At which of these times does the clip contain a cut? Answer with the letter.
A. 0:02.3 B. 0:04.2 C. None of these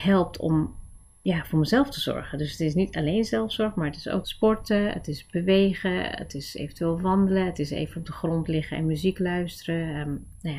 B